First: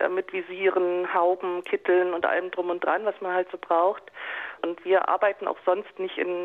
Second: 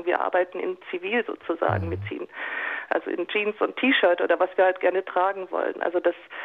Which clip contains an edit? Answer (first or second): first